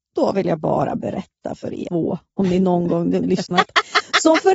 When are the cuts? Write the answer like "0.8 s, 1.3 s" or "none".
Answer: 1.9 s, 3.5 s